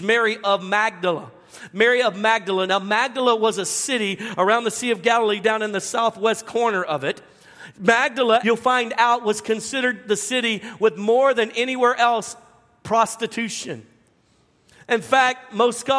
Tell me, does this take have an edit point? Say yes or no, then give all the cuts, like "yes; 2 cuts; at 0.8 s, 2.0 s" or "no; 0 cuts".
yes; 1 cut; at 8.4 s